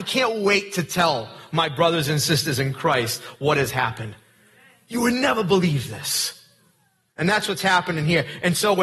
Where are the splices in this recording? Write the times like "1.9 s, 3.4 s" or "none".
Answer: none